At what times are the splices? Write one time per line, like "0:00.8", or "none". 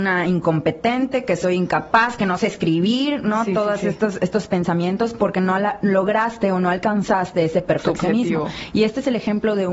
none